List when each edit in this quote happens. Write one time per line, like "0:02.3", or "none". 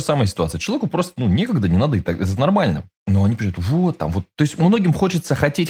none